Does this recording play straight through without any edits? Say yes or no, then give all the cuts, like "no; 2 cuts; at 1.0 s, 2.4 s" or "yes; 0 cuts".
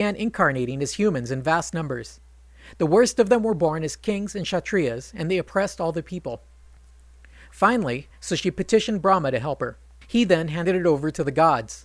no; 2 cuts; at 8.1 s, 10.0 s